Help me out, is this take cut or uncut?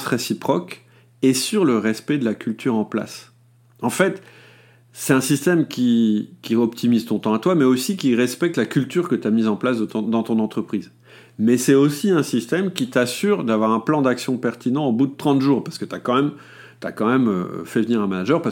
uncut